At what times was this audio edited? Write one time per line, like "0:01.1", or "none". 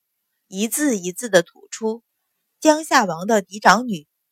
0:02.1